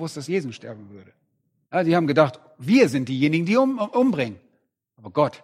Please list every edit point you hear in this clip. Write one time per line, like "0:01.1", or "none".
0:01.7